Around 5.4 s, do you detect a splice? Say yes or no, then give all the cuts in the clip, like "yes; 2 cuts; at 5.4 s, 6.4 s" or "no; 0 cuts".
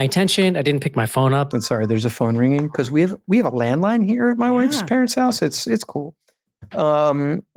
no; 1 cut; at 1.5 s